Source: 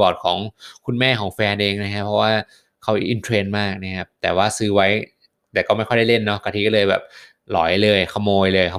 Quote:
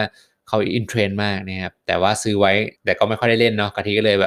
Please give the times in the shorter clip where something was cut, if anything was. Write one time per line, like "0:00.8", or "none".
0:02.8